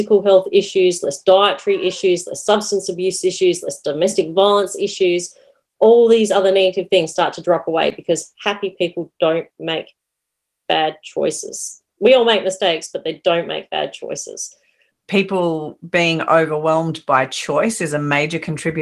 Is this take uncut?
no; 1 cut; at 14.9 s

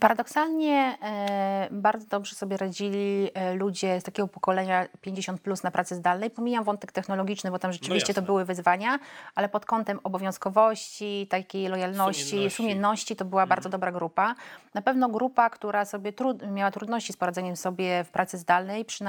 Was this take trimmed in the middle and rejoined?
no; 0 cuts

